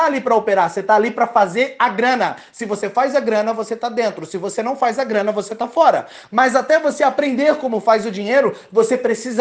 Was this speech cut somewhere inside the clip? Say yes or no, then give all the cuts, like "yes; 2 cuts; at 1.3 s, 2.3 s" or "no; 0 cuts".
no; 0 cuts